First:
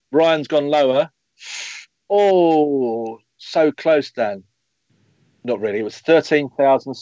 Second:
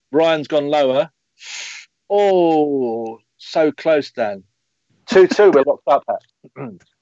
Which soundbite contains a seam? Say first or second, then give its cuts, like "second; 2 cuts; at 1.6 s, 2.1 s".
second; 1 cut; at 5.0 s